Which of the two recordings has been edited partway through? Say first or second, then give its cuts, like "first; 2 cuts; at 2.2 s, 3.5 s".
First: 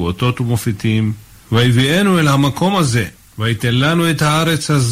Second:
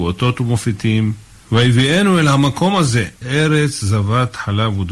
second; 1 cut; at 3.2 s